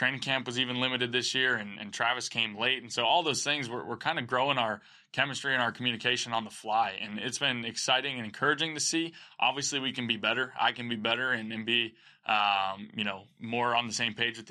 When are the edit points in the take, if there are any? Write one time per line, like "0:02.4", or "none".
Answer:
none